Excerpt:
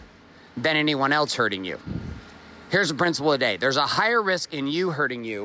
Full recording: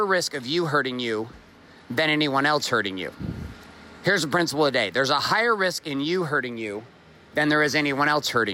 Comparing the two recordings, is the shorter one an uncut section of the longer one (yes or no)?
yes